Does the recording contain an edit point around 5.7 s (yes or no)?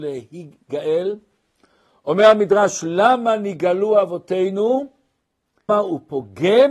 yes